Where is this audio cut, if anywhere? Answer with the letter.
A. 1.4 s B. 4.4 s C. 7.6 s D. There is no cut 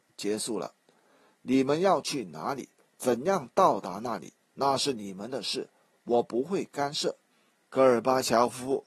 C